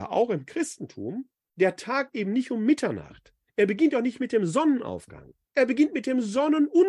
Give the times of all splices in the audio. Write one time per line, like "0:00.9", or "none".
none